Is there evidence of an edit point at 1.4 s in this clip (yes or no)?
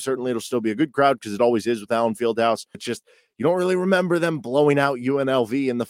no